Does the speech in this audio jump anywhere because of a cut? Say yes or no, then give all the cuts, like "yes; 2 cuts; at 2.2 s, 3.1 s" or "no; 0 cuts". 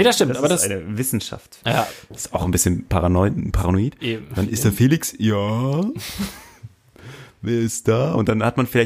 yes; 1 cut; at 1.6 s